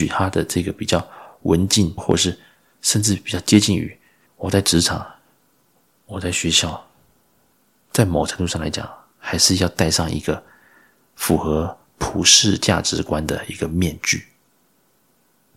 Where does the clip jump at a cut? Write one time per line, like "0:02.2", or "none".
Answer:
0:02.0
0:04.3